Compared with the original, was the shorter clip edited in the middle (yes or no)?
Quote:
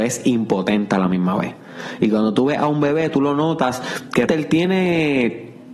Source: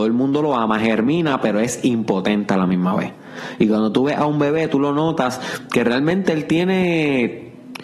yes